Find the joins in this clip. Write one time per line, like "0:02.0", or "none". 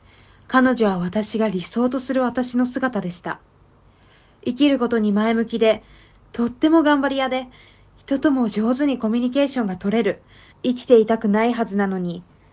0:10.5